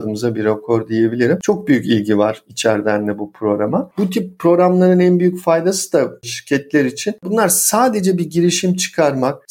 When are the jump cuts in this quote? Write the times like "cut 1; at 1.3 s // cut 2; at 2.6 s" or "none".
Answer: none